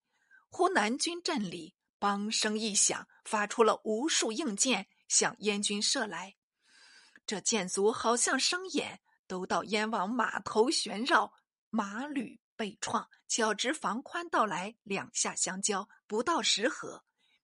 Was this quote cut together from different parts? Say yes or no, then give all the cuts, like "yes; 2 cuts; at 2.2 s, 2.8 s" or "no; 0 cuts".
yes; 1 cut; at 13.2 s